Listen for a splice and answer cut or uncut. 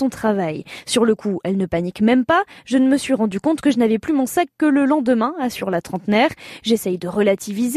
uncut